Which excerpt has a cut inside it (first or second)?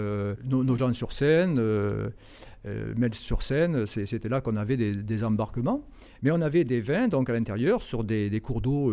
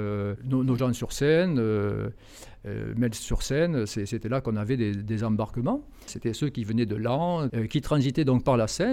second